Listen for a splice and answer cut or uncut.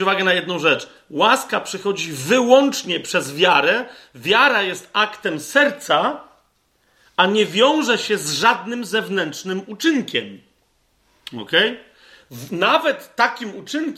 uncut